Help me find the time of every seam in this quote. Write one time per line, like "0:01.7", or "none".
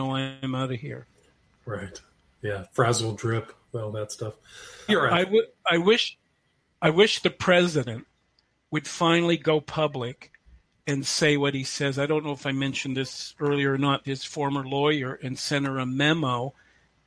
0:04.9
0:14.0